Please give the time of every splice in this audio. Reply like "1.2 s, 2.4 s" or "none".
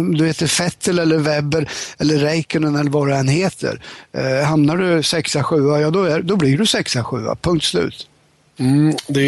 none

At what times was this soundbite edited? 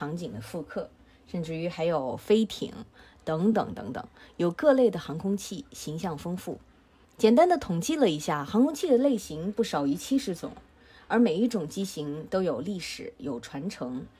none

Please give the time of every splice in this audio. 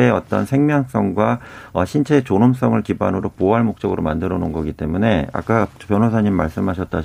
none

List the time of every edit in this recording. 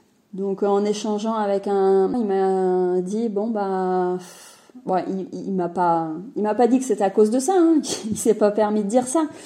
2.1 s

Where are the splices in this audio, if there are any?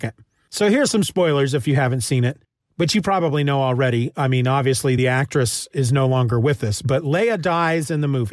none

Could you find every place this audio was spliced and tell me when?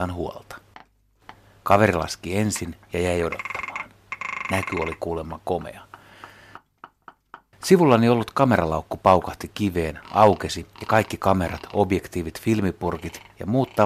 1.6 s

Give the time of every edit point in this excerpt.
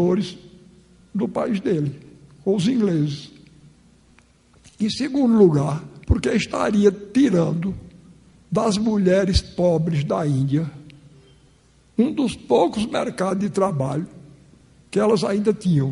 none

